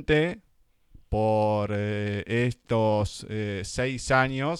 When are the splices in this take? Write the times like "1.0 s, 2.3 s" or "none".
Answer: none